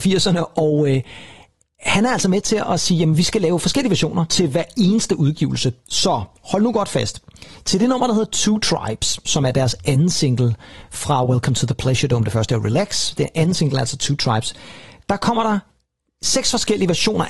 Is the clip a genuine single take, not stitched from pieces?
yes; 0 cuts

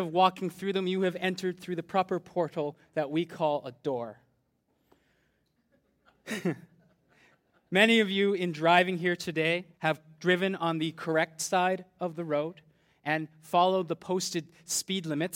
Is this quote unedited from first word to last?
no; 1 cut; at 9.7 s

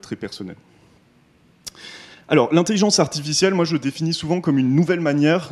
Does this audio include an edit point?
no; 0 cuts

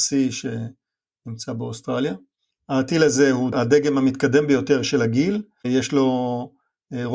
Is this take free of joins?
yes; 0 cuts

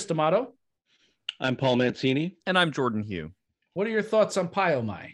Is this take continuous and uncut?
yes; 0 cuts

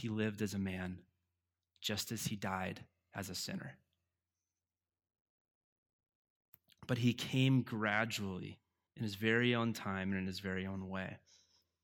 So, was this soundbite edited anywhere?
yes; 1 cut; at 8.9 s

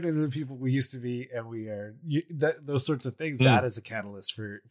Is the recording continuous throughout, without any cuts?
no; 1 cut; at 3.4 s

